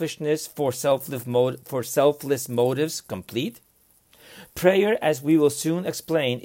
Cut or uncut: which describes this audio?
uncut